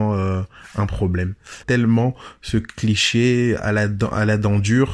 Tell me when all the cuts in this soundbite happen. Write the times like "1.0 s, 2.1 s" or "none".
1.6 s